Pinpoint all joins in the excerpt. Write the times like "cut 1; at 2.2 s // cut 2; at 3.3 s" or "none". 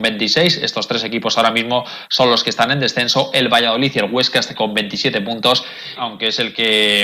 cut 1; at 4.6 s // cut 2; at 6.0 s